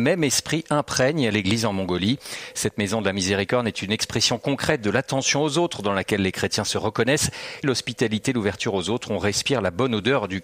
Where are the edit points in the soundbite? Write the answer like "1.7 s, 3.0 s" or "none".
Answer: 7.6 s